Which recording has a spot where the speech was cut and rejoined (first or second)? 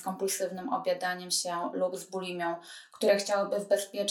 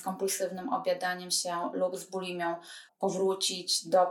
second